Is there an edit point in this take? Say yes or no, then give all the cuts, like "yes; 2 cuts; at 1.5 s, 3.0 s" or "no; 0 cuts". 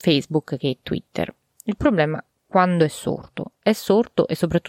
no; 0 cuts